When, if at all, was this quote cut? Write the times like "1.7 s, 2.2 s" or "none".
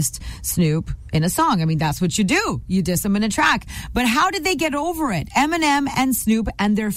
none